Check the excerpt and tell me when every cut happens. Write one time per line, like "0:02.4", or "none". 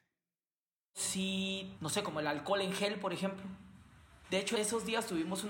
0:01.7
0:04.2